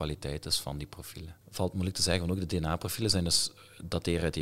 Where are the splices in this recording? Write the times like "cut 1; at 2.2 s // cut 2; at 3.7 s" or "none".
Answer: cut 1; at 1.4 s